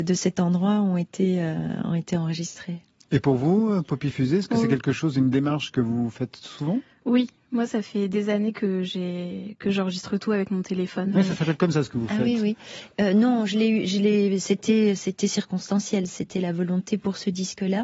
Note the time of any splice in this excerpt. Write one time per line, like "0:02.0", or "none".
0:11.1